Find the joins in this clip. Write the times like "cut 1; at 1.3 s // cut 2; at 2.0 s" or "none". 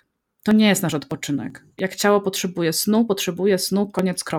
none